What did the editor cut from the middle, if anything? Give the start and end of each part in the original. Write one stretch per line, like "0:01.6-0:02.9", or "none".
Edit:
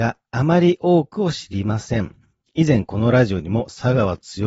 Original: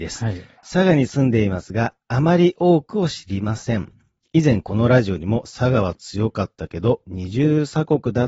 none